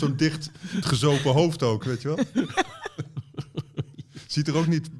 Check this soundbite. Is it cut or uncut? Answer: uncut